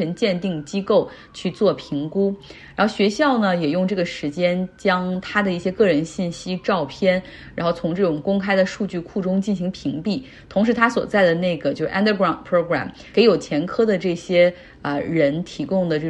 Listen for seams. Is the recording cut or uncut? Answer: uncut